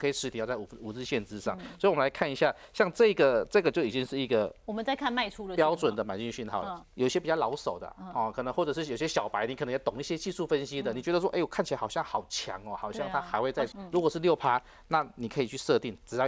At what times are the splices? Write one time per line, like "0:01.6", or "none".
0:06.8
0:13.7